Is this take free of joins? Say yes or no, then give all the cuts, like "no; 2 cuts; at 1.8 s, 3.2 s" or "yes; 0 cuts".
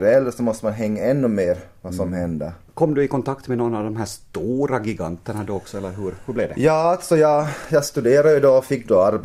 yes; 0 cuts